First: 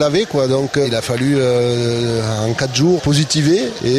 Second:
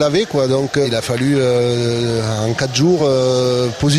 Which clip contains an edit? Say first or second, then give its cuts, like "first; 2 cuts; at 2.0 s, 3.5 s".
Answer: first; 1 cut; at 3.0 s